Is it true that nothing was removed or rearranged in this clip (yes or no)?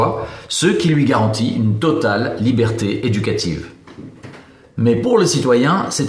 no